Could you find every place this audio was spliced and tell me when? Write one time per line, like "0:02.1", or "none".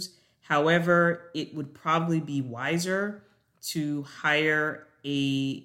none

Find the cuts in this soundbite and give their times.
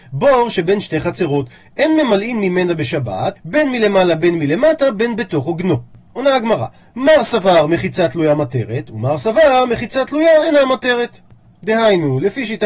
0:03.4
0:06.1

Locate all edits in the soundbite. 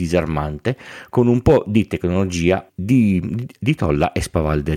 0:02.7

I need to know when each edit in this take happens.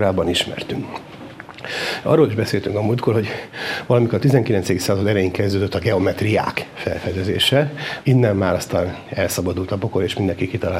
0:08.0

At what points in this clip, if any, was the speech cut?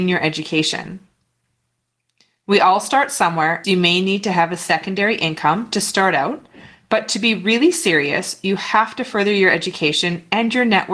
0:03.6

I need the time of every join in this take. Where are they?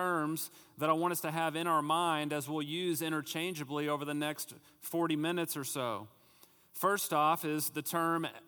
none

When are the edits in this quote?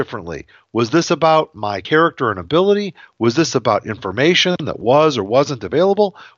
none

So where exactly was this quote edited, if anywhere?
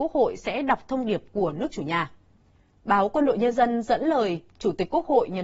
none

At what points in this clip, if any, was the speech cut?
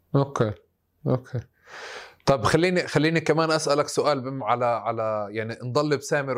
0:02.8

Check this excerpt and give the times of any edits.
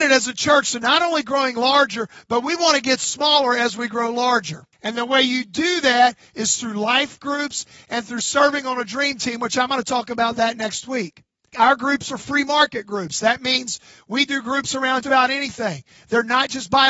0:04.7
0:11.5
0:15.0

